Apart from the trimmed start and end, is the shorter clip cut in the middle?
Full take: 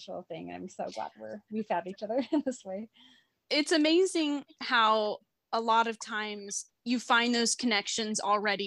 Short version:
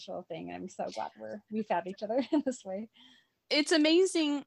no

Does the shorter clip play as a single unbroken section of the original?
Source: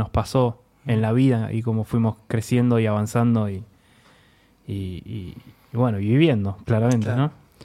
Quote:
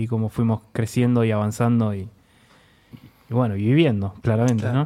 no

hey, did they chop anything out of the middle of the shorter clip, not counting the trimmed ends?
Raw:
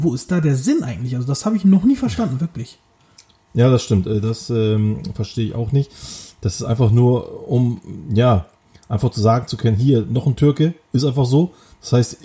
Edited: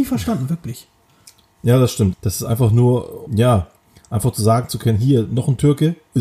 yes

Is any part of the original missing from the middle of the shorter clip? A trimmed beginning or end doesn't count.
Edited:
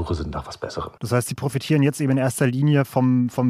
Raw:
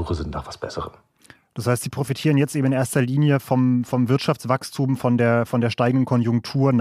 yes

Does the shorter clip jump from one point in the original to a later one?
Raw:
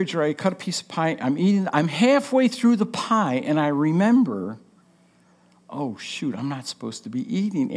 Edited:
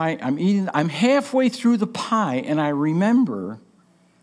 no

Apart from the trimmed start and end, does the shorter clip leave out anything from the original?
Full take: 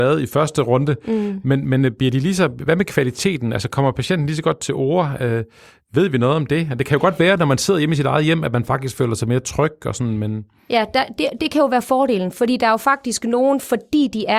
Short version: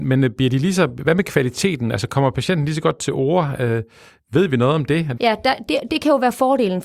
yes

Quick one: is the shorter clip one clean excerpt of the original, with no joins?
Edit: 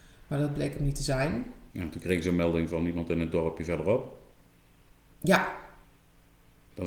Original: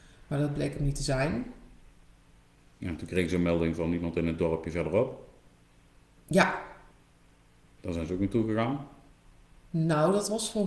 no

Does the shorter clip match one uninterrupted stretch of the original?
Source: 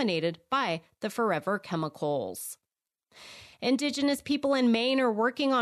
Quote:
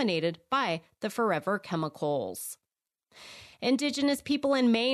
yes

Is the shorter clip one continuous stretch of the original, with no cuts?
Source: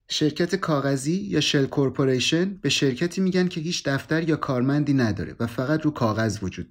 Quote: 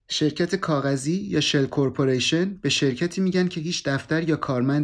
yes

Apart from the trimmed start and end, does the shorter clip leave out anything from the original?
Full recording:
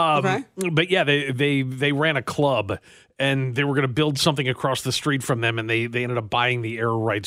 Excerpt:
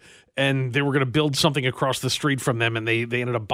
no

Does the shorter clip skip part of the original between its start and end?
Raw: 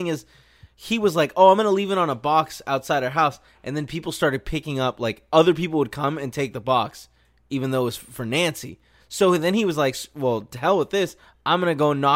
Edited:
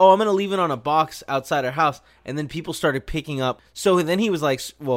yes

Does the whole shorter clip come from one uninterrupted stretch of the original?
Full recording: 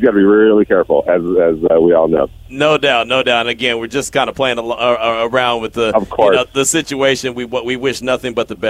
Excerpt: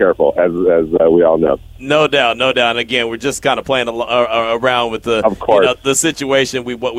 yes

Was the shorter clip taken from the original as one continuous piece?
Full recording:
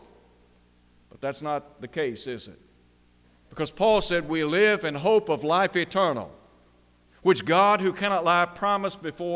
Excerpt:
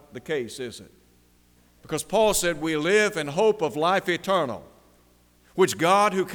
yes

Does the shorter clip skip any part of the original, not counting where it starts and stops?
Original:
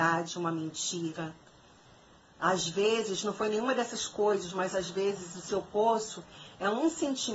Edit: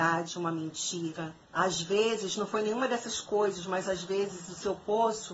yes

